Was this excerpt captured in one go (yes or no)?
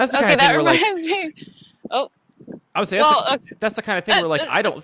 yes